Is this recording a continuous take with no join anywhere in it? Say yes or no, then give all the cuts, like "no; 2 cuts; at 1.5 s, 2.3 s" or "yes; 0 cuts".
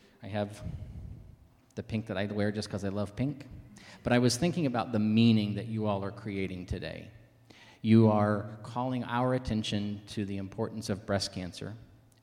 yes; 0 cuts